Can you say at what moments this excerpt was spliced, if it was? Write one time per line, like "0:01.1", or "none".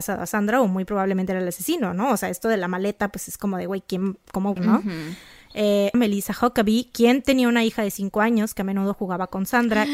0:04.6
0:05.9